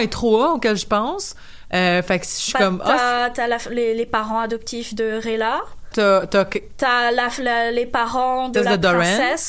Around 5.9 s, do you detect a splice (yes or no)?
yes